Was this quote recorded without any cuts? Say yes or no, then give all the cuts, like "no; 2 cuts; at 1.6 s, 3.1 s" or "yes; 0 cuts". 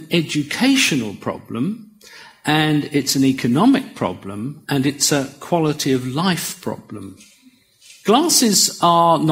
yes; 0 cuts